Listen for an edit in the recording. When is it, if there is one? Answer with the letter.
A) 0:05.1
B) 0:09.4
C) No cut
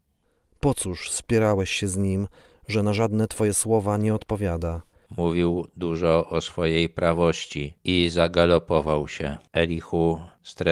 A